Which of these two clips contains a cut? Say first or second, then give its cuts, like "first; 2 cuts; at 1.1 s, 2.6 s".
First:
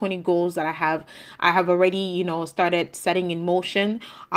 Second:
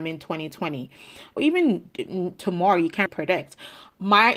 second; 2 cuts; at 1.4 s, 3.1 s